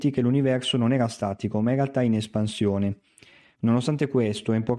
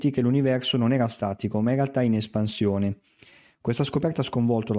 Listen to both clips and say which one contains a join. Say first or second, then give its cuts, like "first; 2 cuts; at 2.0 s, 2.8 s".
first; 1 cut; at 3.6 s